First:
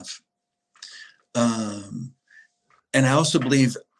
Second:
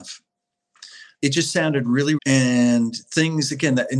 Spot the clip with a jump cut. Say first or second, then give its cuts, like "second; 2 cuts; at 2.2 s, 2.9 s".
second; 2 cuts; at 1.1 s, 2.2 s